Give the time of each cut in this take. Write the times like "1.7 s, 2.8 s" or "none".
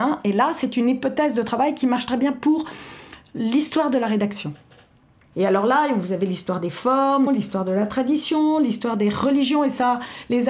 5.3 s, 7.3 s

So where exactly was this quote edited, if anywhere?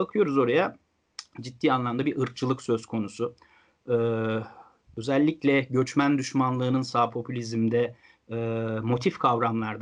none

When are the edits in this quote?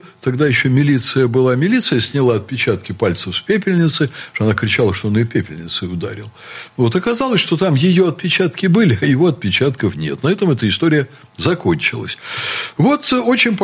none

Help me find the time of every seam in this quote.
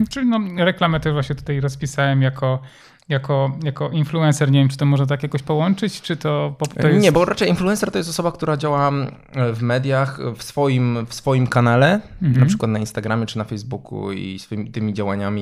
none

